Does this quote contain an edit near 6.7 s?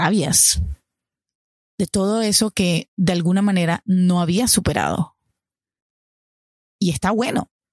yes; 1 cut; at 6.7 s

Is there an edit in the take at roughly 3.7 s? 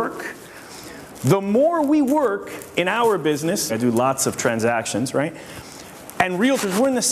yes; 1 cut; at 3.7 s

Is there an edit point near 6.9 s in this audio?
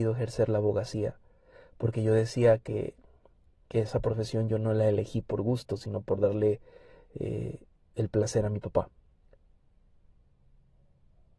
no; 0 cuts

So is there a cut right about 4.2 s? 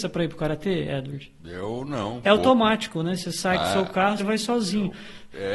yes; 2 cuts; at 2.2 s, 4.2 s

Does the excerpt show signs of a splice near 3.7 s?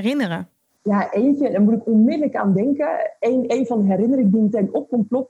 no; 0 cuts

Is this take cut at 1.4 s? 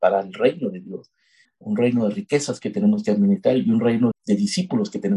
yes; 2 cuts; at 1.4 s, 4.1 s

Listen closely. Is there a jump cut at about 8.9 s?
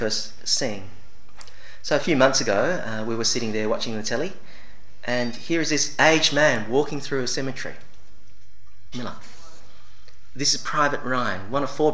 yes; 2 cuts; at 8.9 s, 10.3 s

